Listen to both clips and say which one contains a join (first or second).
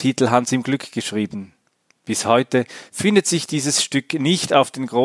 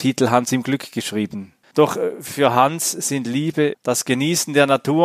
second